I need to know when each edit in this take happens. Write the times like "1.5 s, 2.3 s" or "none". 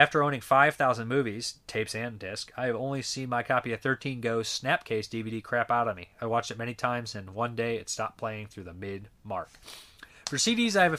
none